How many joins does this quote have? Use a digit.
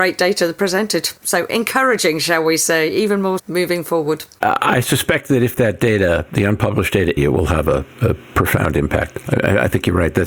2